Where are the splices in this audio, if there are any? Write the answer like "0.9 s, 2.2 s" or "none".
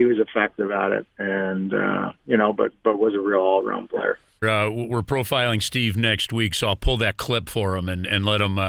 4.4 s